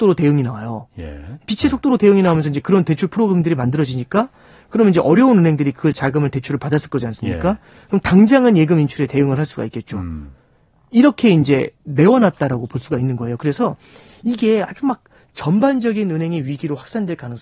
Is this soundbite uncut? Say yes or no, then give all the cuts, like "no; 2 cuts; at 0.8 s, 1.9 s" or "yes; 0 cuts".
yes; 0 cuts